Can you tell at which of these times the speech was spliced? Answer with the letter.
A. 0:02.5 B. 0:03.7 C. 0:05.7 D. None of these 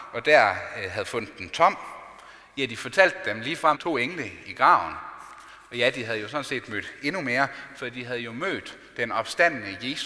B